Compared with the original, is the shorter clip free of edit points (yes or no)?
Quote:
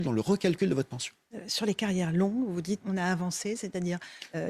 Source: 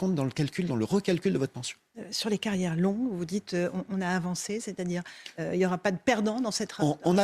no